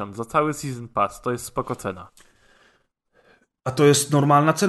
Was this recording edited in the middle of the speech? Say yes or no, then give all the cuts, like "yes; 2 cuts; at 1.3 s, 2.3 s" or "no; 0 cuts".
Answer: no; 0 cuts